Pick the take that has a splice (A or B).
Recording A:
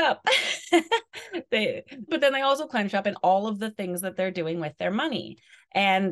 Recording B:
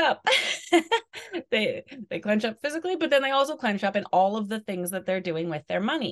A